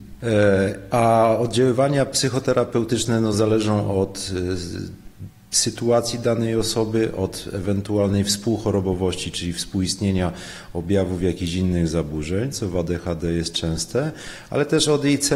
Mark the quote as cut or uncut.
uncut